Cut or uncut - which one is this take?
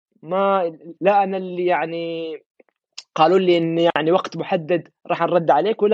cut